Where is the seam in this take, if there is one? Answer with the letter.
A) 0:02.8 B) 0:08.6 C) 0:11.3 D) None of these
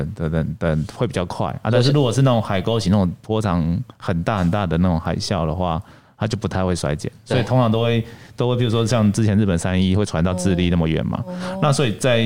D